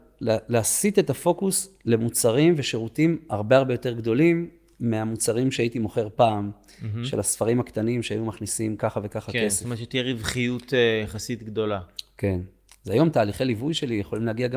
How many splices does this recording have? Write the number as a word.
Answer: zero